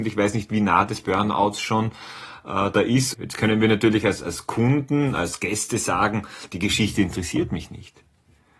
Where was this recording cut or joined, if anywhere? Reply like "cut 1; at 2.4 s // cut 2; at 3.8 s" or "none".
cut 1; at 3.1 s